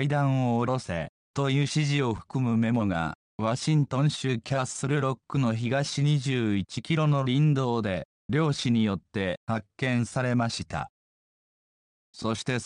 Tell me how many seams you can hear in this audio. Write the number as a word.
zero